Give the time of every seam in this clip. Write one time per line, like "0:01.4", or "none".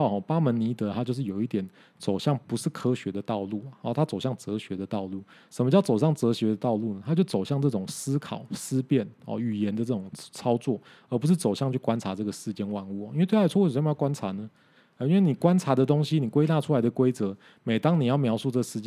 0:02.4